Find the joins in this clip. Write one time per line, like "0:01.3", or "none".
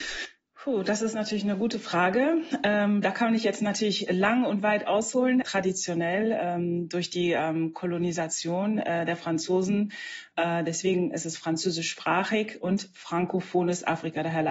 0:05.4